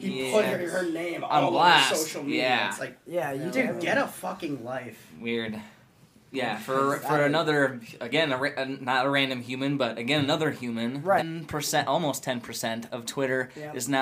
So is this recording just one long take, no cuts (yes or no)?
no